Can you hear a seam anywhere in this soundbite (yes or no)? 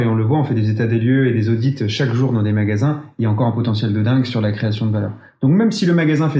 no